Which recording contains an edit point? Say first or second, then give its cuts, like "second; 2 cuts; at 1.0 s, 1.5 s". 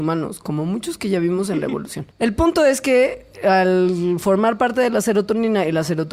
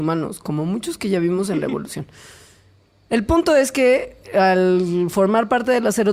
first; 1 cut; at 2.1 s